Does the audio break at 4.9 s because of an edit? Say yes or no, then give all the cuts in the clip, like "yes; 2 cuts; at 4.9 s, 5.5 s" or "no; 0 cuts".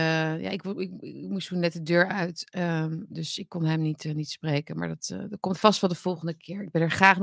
no; 0 cuts